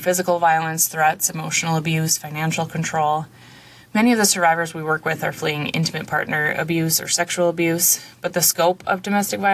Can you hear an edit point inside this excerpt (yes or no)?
no